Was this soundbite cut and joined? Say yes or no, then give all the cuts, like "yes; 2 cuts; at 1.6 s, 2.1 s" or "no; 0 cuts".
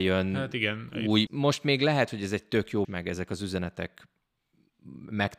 yes; 2 cuts; at 1.3 s, 2.8 s